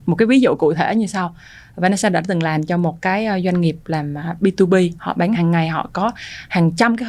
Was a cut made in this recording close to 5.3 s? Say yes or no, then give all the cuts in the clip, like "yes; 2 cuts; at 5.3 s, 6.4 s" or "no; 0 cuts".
yes; 1 cut; at 5.3 s